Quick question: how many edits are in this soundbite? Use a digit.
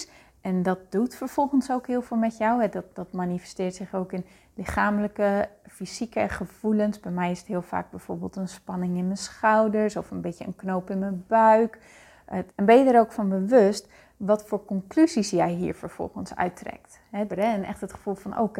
2